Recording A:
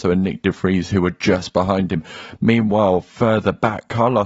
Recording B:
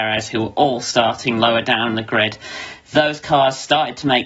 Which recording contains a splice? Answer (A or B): A